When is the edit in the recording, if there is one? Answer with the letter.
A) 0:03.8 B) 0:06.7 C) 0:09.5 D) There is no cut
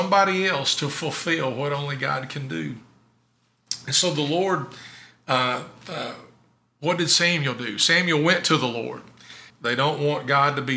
C